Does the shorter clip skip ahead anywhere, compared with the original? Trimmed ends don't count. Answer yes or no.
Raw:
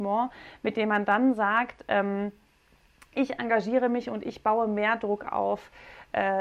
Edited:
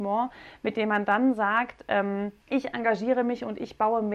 yes